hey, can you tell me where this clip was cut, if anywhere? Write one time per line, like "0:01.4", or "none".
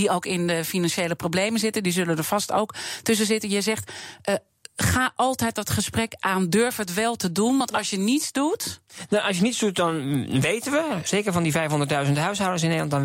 none